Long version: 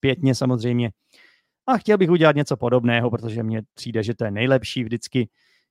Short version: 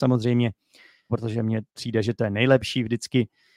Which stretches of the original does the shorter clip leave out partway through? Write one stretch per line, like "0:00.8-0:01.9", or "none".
0:01.5-0:03.1